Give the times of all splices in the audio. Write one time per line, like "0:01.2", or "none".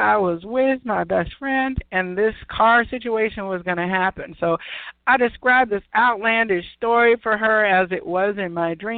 none